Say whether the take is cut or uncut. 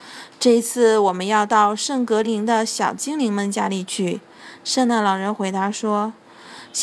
cut